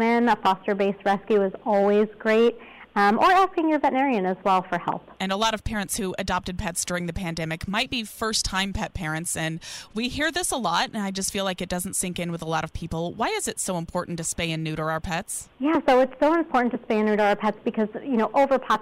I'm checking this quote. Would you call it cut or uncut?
uncut